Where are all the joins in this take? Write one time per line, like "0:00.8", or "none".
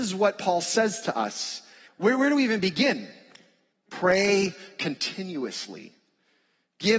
0:01.9
0:03.7